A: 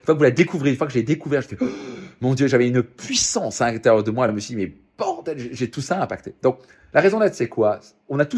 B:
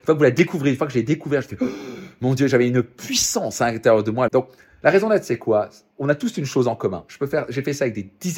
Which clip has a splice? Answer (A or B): B